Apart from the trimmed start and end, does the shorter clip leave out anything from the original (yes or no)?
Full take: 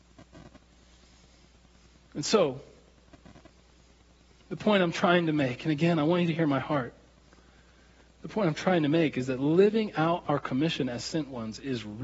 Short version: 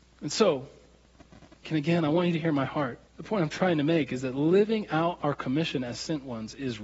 yes